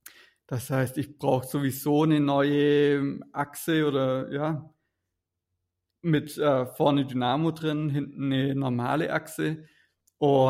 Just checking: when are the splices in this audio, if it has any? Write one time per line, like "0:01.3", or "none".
none